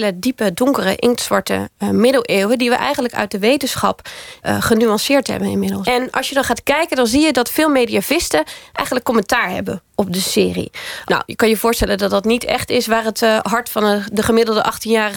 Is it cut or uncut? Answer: cut